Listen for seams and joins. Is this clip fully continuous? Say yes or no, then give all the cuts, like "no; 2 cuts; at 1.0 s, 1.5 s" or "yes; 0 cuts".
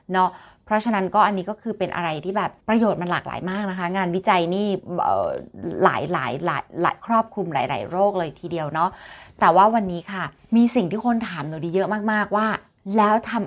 no; 1 cut; at 2.6 s